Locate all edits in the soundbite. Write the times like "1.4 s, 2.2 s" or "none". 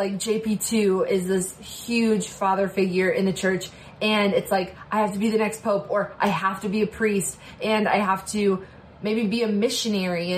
none